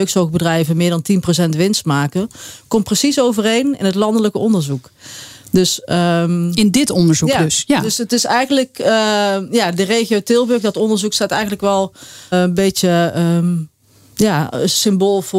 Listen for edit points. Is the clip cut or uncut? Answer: cut